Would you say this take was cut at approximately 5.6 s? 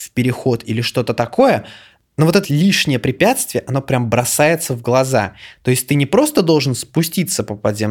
no; 1 cut; at 2.4 s

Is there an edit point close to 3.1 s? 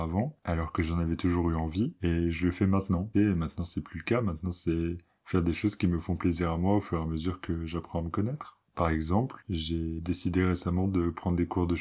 yes; 1 cut; at 3.1 s

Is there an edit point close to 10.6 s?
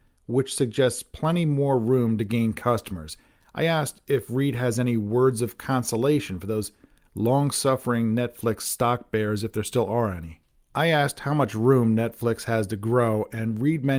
yes; 1 cut; at 10.6 s

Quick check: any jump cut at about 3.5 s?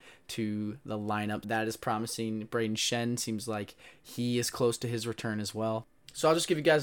no; 1 cut; at 1.4 s

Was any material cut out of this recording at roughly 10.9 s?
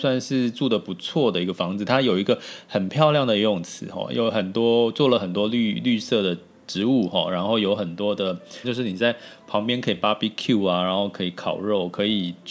no; 1 cut; at 8.6 s

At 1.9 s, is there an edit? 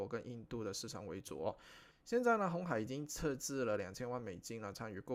yes; 1 cut; at 1.9 s

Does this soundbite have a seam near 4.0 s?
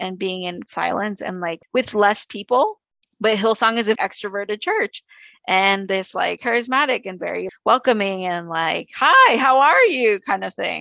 yes; 3 cuts; at 4.0 s, 6.4 s, 7.5 s

